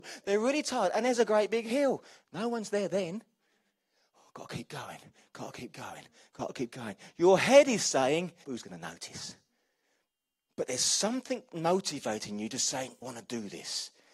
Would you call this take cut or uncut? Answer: cut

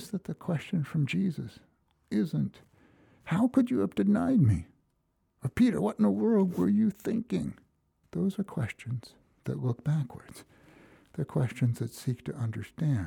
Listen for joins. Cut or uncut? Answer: cut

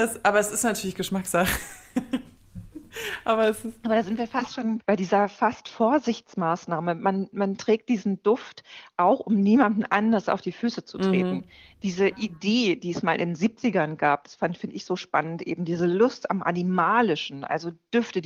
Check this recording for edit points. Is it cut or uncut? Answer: uncut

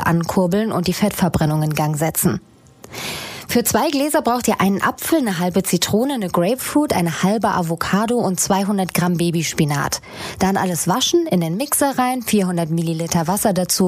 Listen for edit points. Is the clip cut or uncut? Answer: uncut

